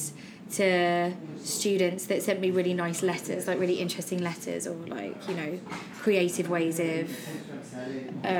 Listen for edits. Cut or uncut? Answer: uncut